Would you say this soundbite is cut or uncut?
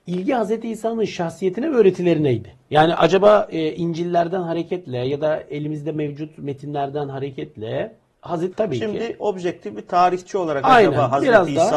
cut